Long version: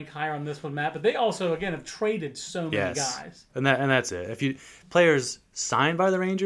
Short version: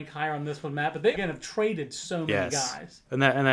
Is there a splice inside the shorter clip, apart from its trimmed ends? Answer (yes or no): yes